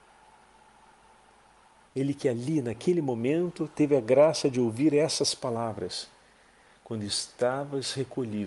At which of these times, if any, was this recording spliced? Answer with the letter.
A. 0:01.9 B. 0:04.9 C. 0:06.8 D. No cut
A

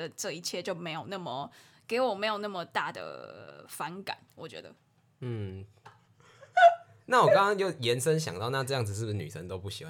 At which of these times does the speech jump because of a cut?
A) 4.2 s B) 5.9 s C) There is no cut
B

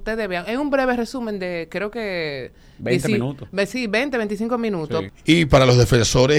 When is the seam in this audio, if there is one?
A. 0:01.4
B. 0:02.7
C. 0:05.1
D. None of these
C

